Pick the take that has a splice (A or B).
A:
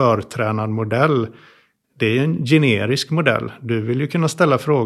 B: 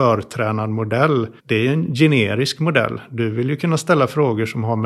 B